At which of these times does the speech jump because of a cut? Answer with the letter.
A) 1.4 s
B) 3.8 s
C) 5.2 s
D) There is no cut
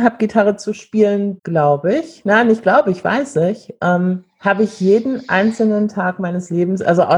A